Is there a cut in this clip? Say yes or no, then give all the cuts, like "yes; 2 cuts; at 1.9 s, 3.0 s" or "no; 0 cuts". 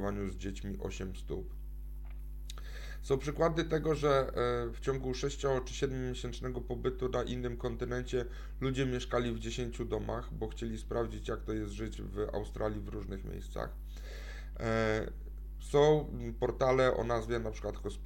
no; 0 cuts